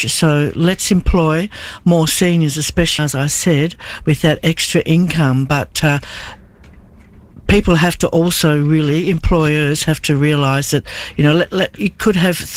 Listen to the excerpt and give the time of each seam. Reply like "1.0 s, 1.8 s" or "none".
3.0 s

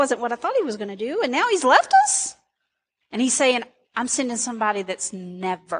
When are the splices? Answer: 3.0 s

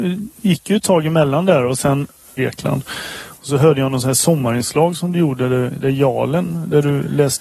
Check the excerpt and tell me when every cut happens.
2.4 s

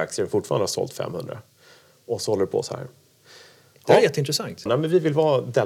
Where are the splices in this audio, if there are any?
4.7 s

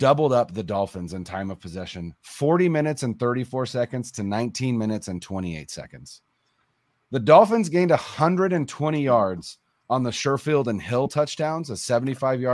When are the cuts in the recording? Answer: none

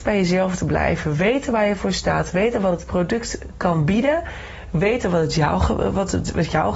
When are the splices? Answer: none

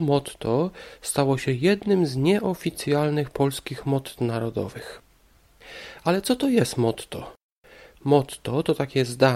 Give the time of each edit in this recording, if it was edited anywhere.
none

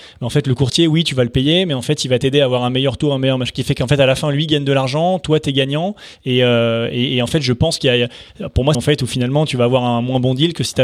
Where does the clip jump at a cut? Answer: 8.7 s

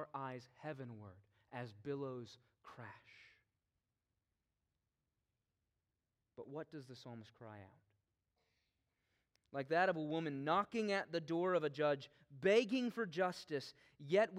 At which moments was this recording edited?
9.4 s

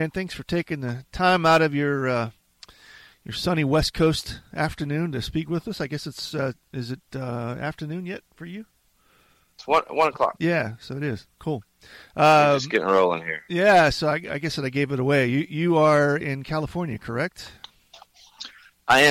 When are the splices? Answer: none

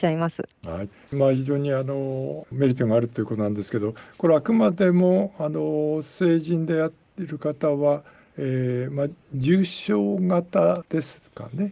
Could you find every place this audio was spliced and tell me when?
1.1 s

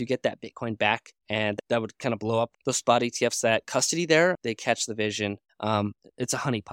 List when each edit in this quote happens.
1.2 s, 4.3 s, 5.5 s

